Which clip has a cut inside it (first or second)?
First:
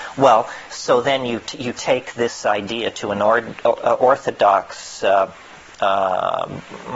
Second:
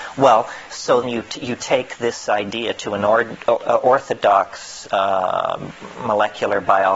second